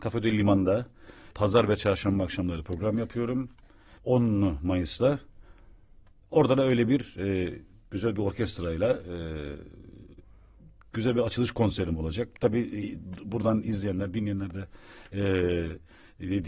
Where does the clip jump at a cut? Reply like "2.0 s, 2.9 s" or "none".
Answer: 4.0 s